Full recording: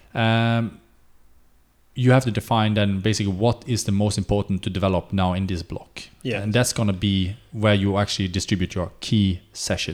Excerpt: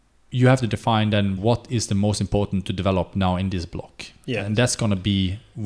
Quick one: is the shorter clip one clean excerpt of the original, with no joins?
no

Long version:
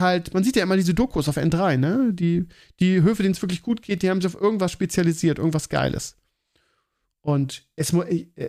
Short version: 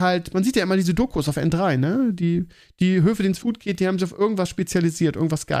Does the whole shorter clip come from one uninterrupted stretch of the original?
no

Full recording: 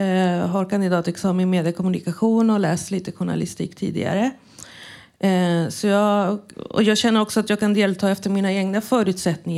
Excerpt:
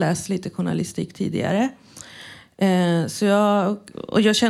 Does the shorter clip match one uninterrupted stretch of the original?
yes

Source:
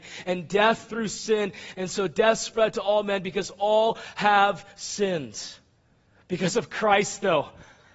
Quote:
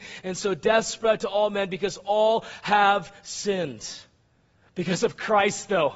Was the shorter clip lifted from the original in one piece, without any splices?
yes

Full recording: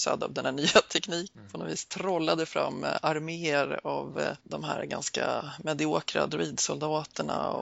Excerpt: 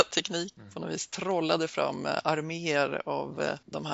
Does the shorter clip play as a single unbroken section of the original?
yes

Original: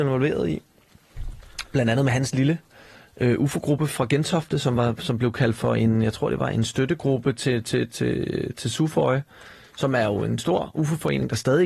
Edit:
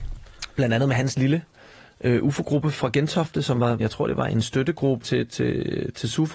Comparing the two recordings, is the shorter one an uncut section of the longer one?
no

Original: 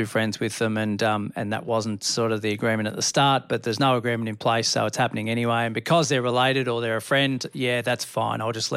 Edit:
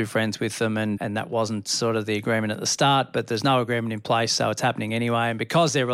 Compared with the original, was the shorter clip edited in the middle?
yes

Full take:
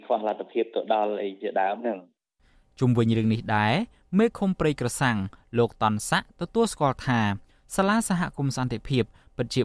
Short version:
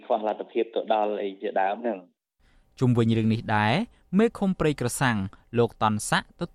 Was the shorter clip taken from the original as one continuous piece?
yes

